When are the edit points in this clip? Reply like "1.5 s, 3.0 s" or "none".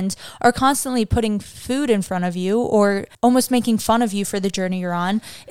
3.1 s